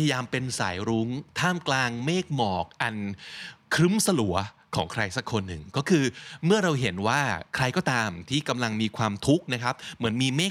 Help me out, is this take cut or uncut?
uncut